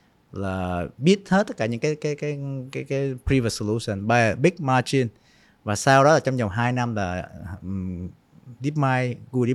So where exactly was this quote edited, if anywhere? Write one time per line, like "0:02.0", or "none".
none